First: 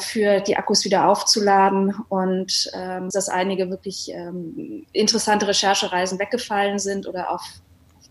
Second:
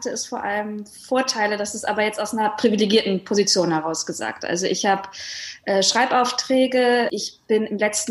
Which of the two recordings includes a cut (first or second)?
first